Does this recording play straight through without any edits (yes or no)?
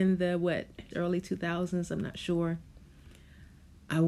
no